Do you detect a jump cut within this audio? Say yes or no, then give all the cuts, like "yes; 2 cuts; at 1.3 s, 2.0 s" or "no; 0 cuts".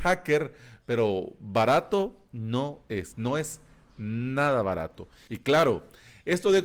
yes; 2 cuts; at 3.1 s, 5.3 s